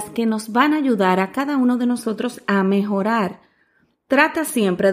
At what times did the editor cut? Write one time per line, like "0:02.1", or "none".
none